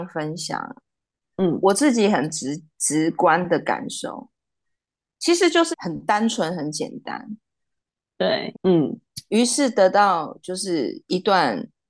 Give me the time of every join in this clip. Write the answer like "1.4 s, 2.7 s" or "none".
5.7 s, 8.5 s